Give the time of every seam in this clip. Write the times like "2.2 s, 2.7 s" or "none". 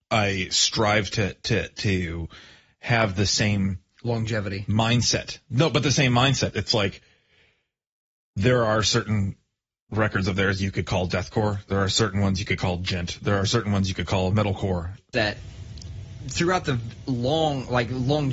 15.1 s

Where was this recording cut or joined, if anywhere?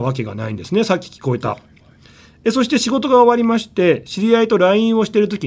none

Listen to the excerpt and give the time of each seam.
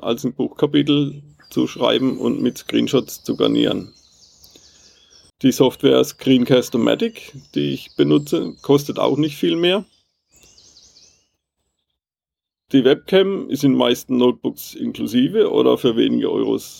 5.3 s

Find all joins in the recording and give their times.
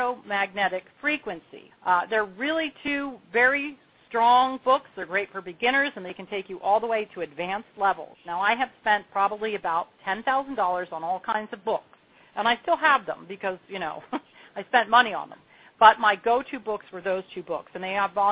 1.7 s

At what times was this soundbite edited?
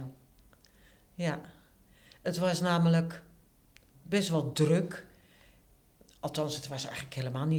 3.9 s

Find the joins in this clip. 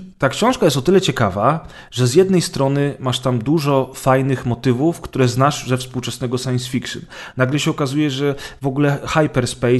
none

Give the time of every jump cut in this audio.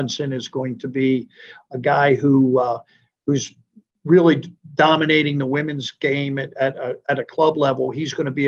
none

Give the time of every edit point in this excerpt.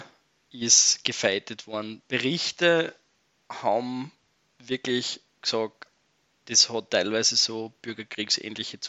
none

